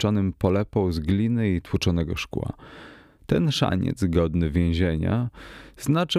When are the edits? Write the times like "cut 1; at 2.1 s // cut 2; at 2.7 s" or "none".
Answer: none